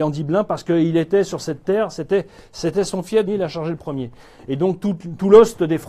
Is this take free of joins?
no; 1 cut; at 3.3 s

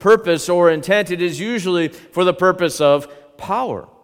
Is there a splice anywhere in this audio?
no; 0 cuts

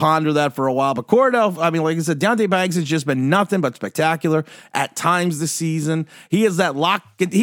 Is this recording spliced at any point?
no; 0 cuts

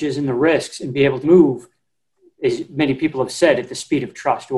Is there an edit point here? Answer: yes; 1 cut; at 1.2 s

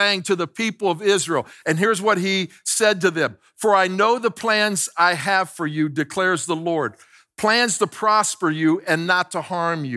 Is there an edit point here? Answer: no; 0 cuts

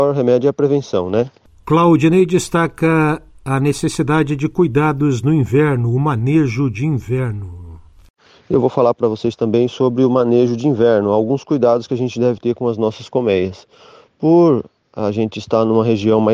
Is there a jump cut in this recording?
no; 0 cuts

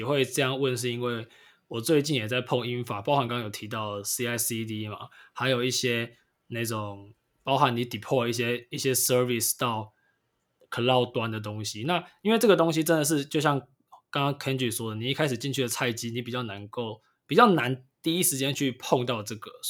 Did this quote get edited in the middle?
yes; 1 cut; at 3.3 s

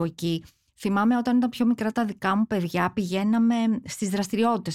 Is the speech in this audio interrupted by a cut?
no; 0 cuts

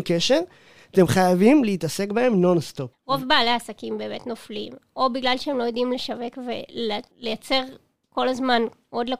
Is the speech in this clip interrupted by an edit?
yes; 2 cuts; at 2.9 s, 7.1 s

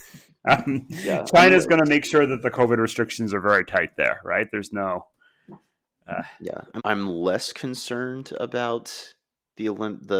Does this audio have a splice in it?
yes; 1 cut; at 6.8 s

